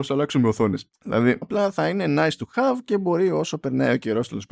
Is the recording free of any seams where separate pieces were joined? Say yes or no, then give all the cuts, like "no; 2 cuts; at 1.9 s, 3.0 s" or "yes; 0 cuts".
no; 1 cut; at 1.4 s